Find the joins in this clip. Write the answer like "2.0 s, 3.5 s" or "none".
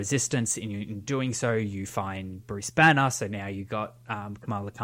none